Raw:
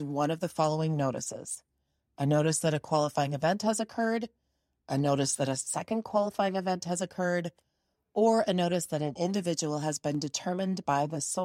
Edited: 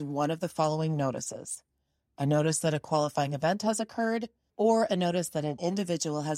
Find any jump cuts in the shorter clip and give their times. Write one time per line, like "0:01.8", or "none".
0:04.5